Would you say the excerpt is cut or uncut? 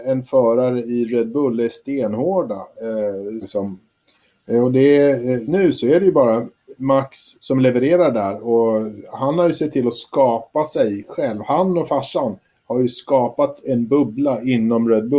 cut